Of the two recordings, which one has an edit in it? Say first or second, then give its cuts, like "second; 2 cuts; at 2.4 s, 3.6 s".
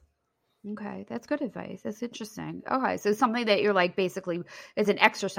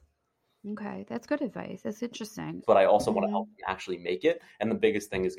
second; 1 cut; at 2.6 s